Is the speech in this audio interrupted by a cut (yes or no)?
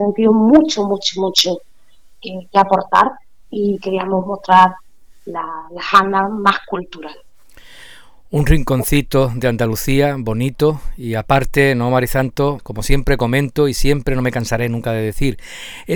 yes